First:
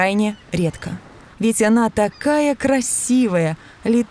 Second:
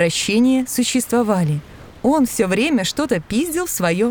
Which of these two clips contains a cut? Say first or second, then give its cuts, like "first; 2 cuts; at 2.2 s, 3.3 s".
first; 1 cut; at 1.3 s